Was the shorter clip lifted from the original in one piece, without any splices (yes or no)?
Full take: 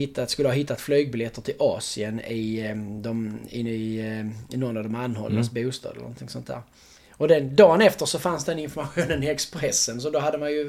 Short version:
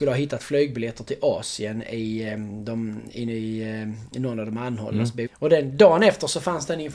no